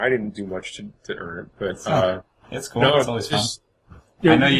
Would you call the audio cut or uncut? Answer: uncut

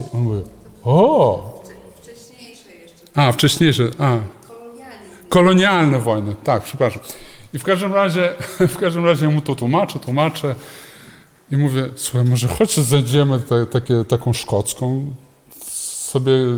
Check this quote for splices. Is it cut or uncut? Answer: uncut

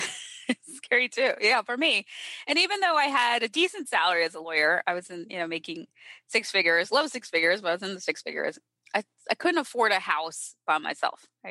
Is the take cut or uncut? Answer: uncut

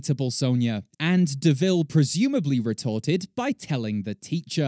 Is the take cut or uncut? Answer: cut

